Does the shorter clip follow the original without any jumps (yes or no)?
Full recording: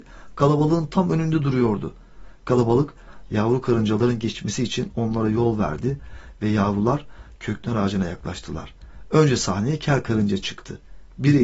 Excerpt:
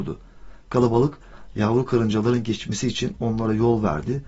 yes